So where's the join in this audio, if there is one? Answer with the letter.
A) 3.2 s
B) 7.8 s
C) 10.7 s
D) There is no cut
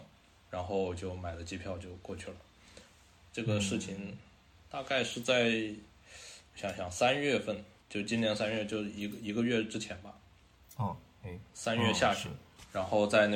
B